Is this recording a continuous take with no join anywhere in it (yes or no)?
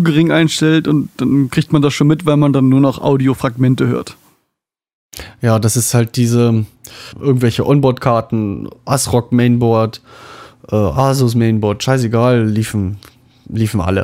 no